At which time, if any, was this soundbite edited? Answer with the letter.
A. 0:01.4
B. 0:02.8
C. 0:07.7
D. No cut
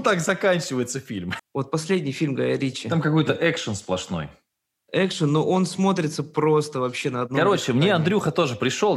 A